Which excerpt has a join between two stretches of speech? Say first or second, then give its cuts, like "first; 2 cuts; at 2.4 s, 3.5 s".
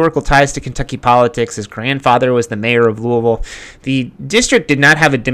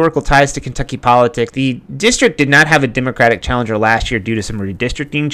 second; 1 cut; at 1.5 s